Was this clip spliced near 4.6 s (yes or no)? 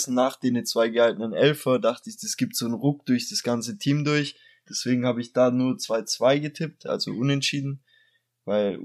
yes